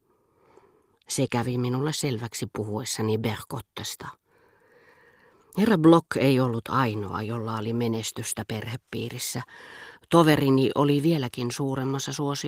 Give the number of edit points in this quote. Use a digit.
0